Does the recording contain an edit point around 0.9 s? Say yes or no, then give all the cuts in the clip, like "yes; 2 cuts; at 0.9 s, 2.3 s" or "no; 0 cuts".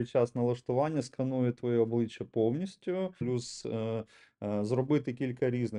no; 1 cut; at 3.2 s